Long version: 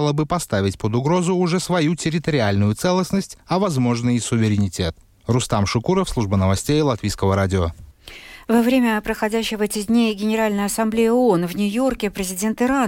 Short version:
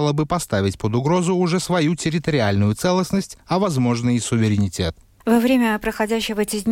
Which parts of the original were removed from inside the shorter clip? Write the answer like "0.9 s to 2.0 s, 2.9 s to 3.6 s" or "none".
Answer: 5.2 s to 8.4 s